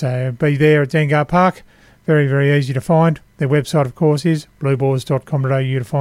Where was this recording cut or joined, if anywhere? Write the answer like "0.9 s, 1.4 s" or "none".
none

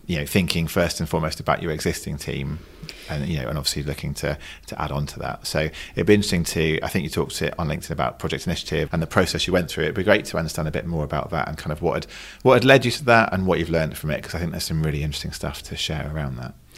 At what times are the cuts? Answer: 8.9 s, 15.6 s

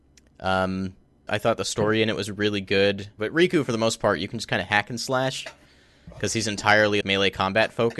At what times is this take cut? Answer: 1.3 s, 3.2 s, 7.0 s

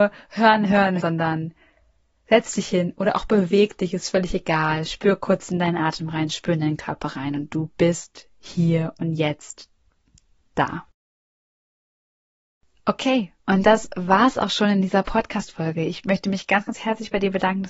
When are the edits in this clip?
1.0 s

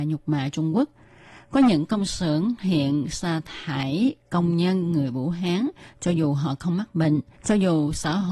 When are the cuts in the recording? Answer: 7.4 s

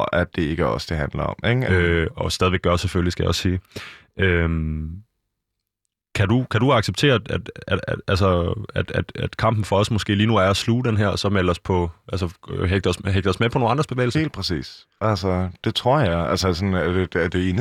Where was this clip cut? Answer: 1.7 s

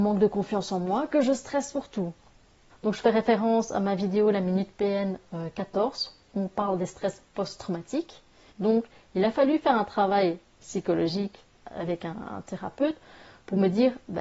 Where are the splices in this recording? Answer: 2.7 s, 8.5 s

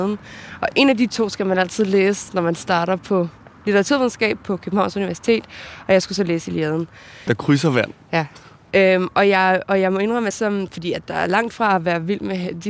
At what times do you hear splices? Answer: 7.3 s, 8.7 s, 10.3 s

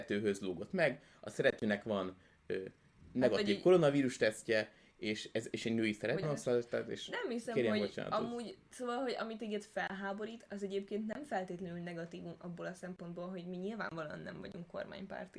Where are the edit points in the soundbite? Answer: 6.2 s

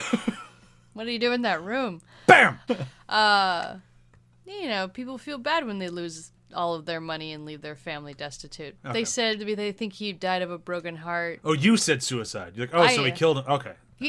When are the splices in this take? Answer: 2.7 s, 8.8 s

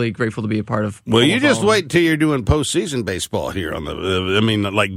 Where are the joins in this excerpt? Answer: none

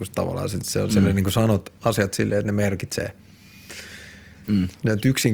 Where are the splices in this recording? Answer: 4.4 s

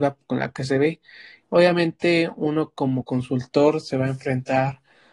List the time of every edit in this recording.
1.4 s

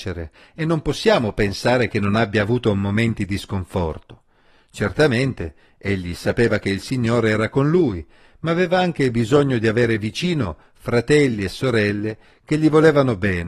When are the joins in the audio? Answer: none

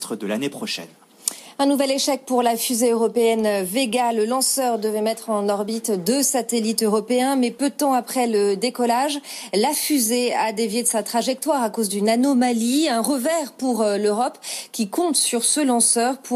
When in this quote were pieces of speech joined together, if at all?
none

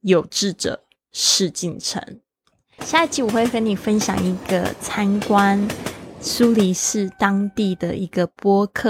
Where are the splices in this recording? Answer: 2.8 s

